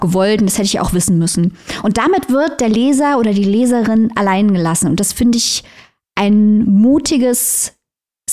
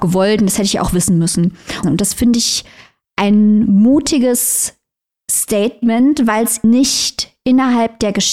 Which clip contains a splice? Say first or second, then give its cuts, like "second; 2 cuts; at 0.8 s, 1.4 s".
second; 2 cuts; at 1.8 s, 6.6 s